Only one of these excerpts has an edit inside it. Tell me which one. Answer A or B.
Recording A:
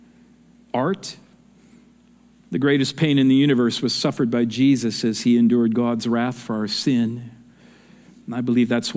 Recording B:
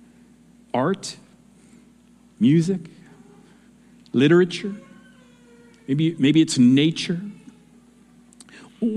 A